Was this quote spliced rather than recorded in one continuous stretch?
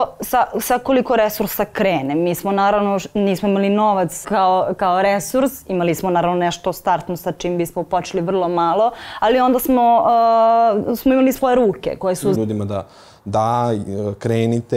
yes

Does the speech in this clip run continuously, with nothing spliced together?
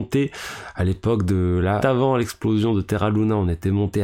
no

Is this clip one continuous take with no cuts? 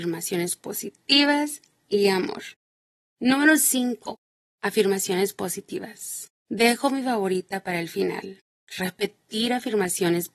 no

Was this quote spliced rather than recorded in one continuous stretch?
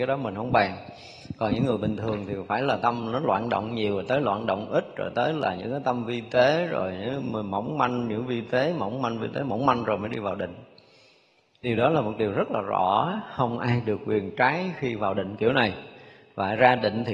no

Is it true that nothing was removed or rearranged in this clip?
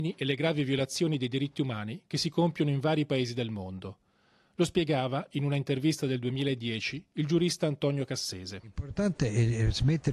yes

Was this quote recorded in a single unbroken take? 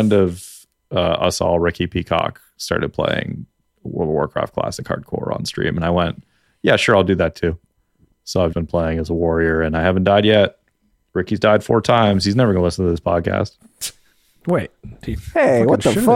no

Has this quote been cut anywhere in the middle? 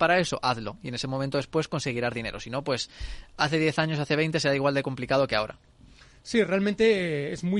no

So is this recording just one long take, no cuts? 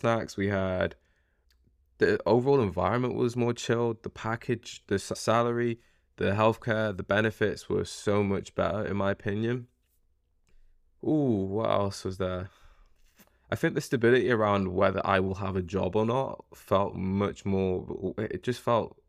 yes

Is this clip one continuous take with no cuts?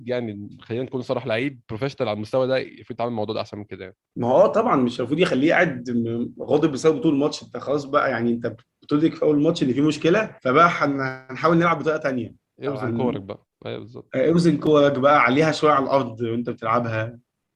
no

